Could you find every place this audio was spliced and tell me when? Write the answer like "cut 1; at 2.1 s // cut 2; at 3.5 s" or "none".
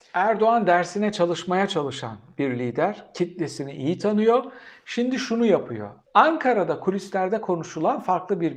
cut 1; at 6.1 s